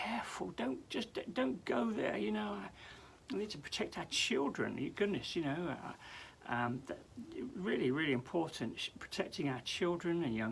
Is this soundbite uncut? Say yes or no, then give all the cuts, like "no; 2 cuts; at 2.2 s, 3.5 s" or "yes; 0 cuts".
yes; 0 cuts